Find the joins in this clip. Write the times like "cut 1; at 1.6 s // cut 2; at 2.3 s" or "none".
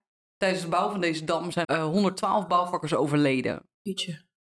cut 1; at 1.6 s